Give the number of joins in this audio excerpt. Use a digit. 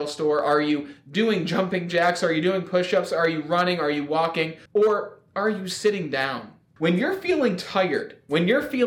2